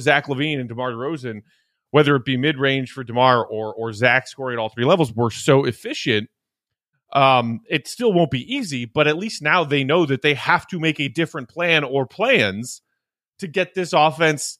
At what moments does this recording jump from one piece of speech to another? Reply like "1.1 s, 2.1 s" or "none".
6.9 s